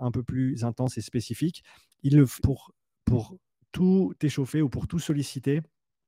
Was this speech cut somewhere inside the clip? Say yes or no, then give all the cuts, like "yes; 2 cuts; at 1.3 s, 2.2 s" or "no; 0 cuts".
yes; 1 cut; at 2.4 s